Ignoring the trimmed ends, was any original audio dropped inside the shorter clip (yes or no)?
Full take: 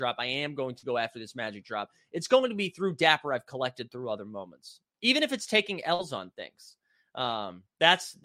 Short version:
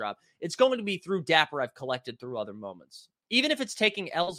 no